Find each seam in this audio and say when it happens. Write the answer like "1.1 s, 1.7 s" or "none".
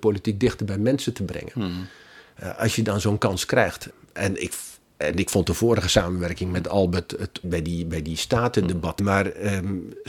7.4 s, 9.0 s